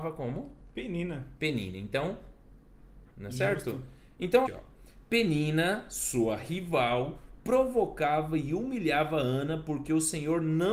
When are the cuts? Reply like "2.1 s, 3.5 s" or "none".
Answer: 3.1 s, 4.5 s